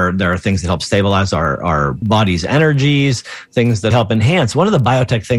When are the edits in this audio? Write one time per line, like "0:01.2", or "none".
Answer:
0:02.0
0:03.9